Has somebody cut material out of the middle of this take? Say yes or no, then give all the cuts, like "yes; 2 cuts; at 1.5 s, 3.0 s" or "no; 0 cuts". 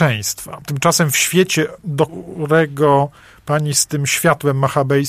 yes; 1 cut; at 2.1 s